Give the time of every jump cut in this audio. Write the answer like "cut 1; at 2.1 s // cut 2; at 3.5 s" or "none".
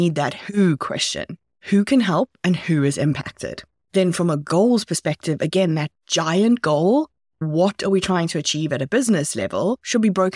none